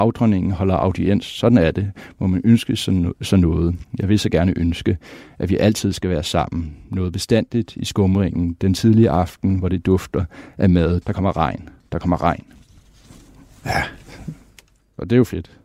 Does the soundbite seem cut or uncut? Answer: cut